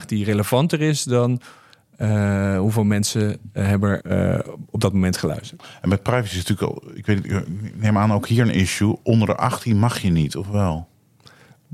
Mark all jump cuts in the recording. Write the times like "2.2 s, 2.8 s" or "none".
4.0 s